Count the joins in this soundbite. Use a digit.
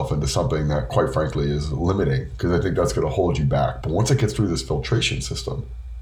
1